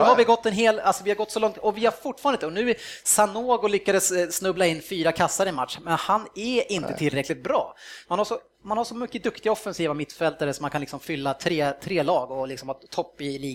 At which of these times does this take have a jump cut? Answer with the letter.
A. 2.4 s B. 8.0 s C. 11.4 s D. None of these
B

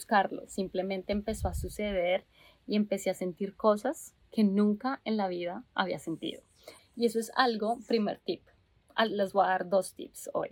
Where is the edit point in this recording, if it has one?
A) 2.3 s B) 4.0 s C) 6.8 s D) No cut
C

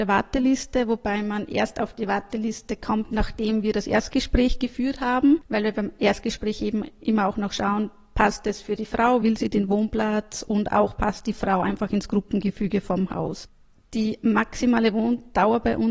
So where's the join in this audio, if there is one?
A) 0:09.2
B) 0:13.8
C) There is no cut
A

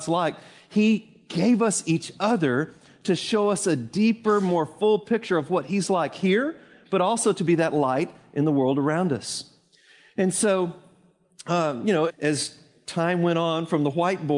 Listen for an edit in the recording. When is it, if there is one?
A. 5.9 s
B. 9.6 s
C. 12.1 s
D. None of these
C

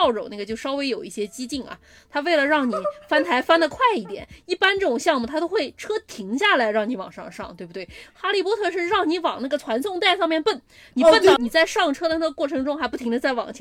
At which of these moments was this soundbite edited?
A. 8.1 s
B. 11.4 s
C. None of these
B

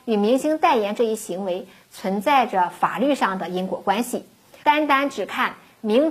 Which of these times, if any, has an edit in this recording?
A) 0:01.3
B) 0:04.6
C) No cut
B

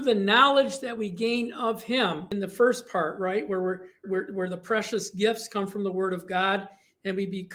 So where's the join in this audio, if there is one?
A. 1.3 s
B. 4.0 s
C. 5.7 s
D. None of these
B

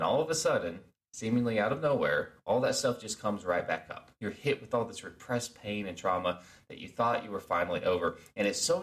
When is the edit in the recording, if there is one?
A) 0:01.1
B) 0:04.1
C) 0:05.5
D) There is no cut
B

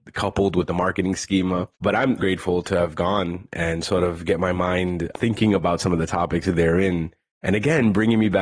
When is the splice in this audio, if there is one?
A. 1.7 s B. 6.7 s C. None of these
A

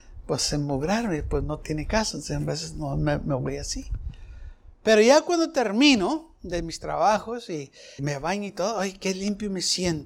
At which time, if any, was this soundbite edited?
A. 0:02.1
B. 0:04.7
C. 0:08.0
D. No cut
C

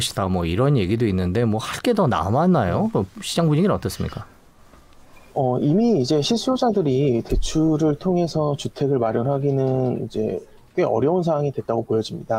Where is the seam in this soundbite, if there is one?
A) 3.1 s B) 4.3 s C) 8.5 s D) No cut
D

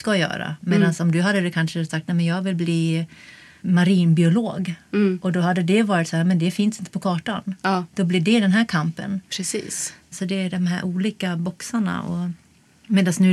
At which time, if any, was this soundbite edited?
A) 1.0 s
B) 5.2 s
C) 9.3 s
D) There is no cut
D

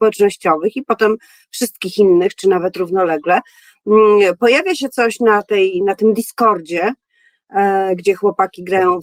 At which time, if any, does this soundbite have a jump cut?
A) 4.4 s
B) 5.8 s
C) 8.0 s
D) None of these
D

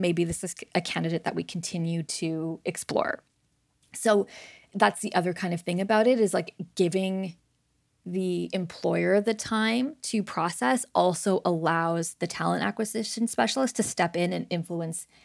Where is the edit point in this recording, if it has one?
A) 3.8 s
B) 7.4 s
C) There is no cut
C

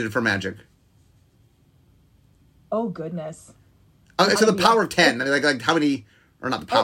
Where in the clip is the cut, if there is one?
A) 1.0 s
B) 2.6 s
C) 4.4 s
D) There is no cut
C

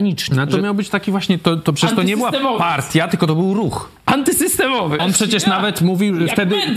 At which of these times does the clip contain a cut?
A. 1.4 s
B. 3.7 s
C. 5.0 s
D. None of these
C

